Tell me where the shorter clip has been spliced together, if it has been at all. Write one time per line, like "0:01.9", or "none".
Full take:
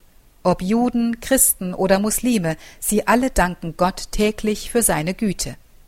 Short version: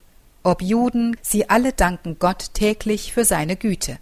0:01.2